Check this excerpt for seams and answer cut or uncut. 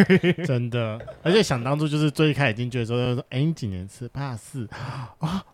uncut